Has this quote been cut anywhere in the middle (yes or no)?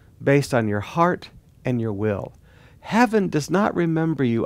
no